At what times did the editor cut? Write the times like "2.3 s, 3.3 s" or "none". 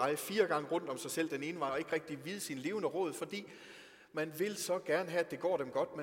1.7 s

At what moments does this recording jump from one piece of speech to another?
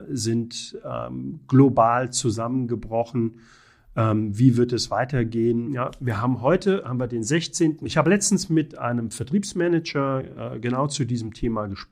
5.7 s, 7.8 s

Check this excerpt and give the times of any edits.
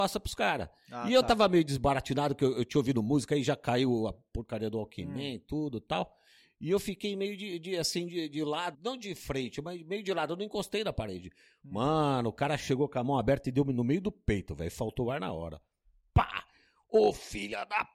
8.7 s

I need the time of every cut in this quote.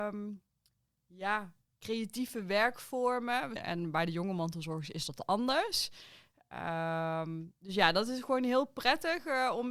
3.6 s

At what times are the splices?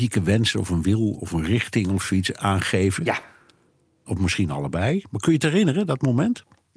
4.1 s

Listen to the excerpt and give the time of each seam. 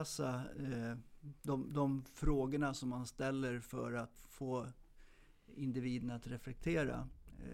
1.4 s, 4.2 s

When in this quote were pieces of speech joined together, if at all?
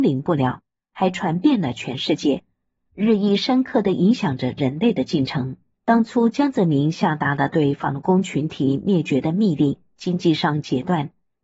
5.7 s, 9.9 s

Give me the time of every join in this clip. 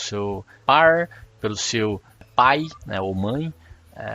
2.8 s

